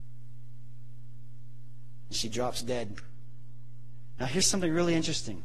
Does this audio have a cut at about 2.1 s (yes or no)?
no